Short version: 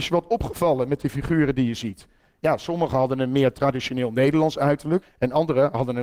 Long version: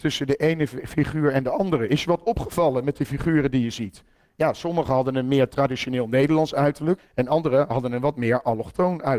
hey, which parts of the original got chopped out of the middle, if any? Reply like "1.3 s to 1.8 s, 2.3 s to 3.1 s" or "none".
none